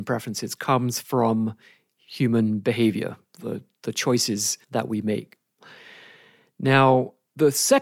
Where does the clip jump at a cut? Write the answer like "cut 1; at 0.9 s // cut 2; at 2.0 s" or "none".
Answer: cut 1; at 4.6 s